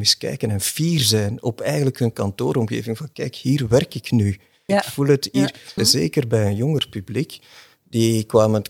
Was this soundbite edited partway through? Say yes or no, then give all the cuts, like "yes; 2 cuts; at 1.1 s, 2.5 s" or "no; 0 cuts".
yes; 2 cuts; at 4.7 s, 5.8 s